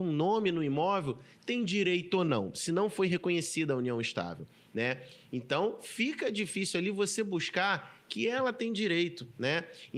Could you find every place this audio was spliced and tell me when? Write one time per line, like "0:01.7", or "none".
none